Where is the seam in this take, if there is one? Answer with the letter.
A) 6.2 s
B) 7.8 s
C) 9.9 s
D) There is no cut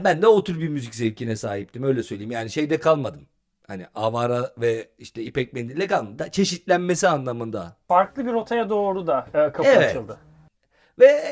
A